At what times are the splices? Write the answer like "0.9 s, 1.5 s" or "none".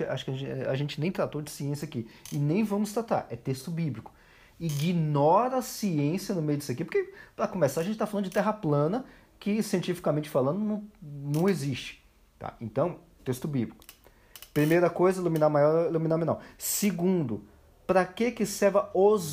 13.2 s

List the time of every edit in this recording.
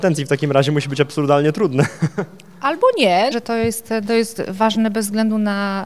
3.3 s

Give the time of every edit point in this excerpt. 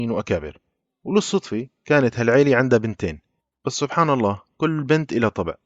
none

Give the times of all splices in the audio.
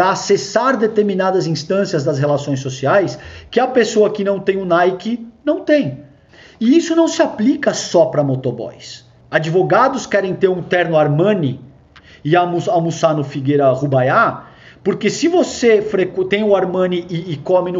9.2 s

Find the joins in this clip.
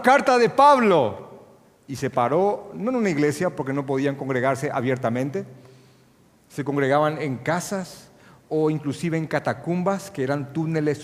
none

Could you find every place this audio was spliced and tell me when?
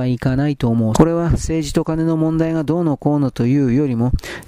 0.9 s

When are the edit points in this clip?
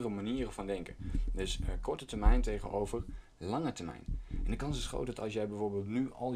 none

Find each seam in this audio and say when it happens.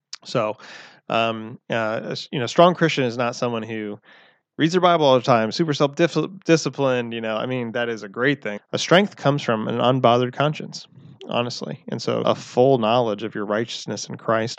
1.6 s, 8.6 s, 12.2 s

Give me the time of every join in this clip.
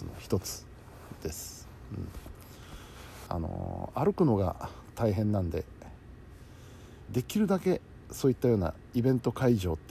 3.3 s, 7.1 s

